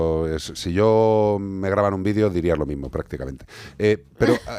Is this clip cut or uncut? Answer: uncut